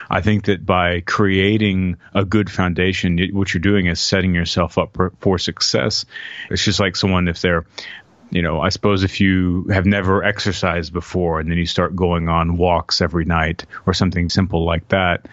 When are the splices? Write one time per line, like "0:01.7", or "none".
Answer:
0:06.5
0:14.3